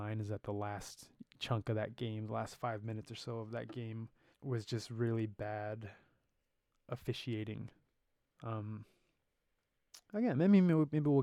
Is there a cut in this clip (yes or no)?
yes